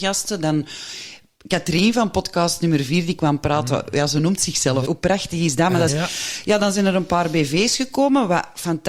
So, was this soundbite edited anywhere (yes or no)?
yes